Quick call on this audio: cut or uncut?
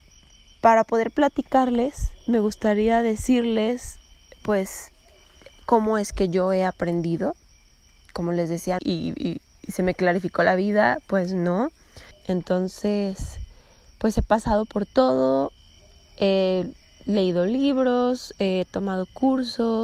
cut